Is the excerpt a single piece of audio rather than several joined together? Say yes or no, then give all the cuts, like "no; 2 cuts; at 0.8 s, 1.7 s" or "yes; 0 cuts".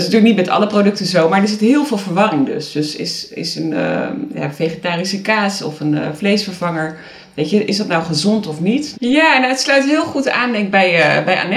no; 1 cut; at 8.9 s